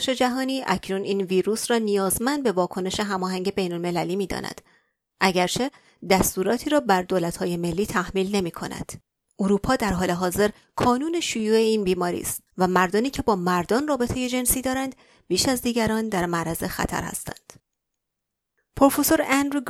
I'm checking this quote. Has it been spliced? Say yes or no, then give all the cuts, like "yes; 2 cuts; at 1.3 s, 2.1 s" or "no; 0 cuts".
no; 0 cuts